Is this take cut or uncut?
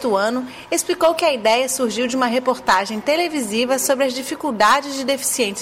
uncut